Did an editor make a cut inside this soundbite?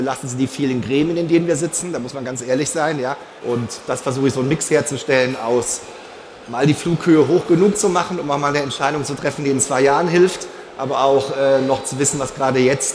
yes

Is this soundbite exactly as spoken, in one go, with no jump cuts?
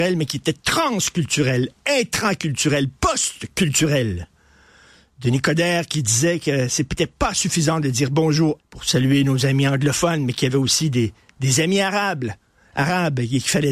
no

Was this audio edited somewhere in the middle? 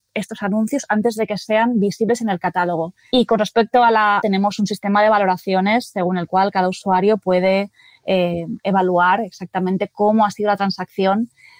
yes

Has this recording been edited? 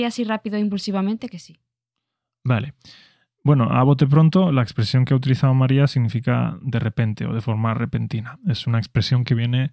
no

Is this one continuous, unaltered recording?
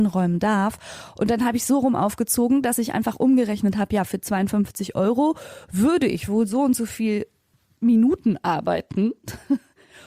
yes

